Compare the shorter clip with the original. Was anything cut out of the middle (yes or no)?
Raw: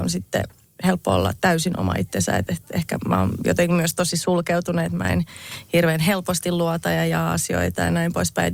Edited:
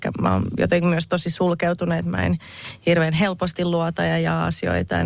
no